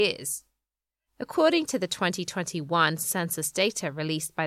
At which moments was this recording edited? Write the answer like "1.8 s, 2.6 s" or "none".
1.0 s